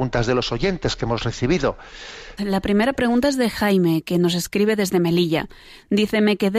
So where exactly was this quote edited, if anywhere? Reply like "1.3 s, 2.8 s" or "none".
2.4 s